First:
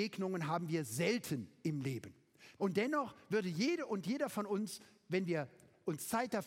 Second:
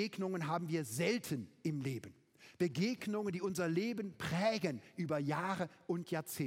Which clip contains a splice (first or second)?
first